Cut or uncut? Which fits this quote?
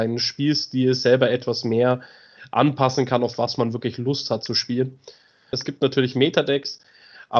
cut